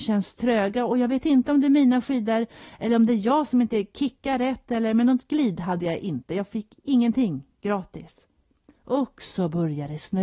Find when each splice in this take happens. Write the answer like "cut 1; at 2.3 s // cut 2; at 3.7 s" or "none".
none

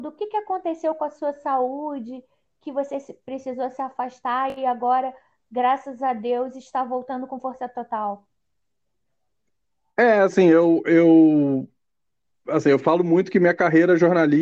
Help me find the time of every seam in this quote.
none

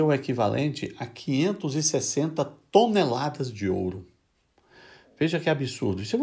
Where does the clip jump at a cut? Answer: none

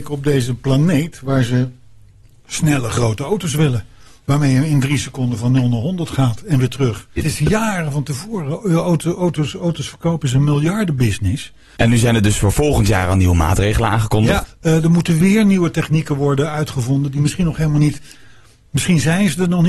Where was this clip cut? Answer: cut 1; at 7.2 s // cut 2; at 11.8 s // cut 3; at 14.4 s

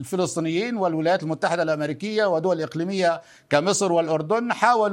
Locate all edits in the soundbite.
none

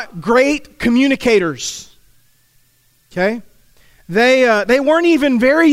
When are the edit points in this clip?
none

